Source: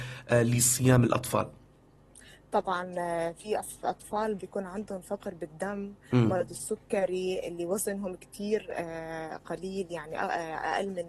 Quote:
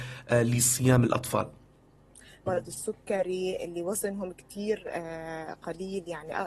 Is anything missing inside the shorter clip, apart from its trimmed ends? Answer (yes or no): yes